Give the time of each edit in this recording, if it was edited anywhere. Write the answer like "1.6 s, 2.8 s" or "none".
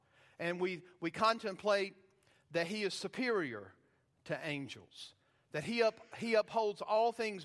none